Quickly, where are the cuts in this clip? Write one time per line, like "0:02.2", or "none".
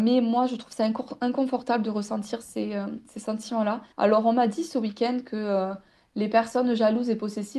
0:03.9